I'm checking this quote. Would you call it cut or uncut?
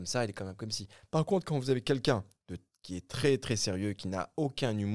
uncut